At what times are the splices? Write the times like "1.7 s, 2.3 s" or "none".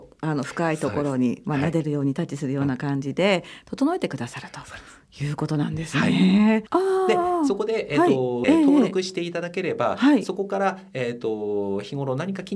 6.7 s, 8.4 s